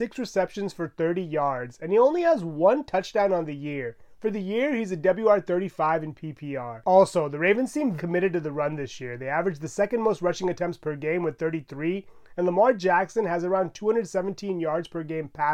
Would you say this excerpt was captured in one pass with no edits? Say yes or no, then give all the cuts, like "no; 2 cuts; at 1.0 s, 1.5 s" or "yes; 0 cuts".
no; 2 cuts; at 6.8 s, 8.0 s